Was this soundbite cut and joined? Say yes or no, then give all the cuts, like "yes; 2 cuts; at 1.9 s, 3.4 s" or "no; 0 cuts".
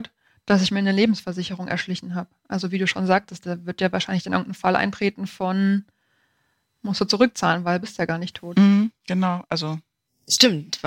yes; 1 cut; at 9.4 s